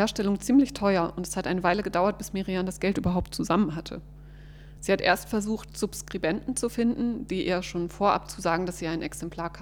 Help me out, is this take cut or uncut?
uncut